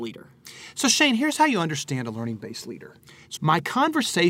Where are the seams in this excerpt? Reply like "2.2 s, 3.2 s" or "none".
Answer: 3.4 s